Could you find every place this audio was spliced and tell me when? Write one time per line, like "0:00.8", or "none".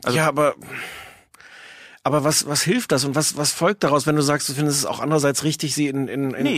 none